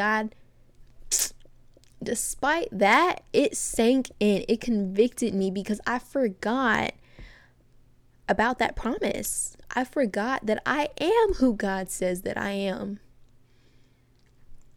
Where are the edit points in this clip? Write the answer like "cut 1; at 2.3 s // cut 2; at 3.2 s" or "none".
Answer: none